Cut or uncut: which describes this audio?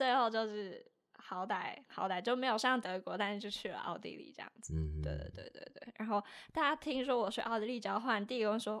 uncut